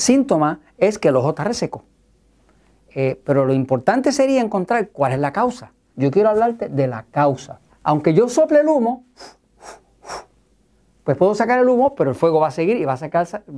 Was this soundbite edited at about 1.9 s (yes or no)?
no